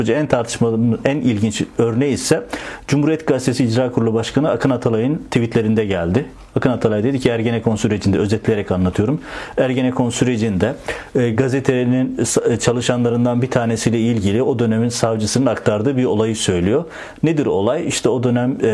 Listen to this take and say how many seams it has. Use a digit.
0